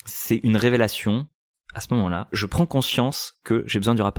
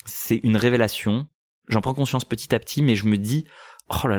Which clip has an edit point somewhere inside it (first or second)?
first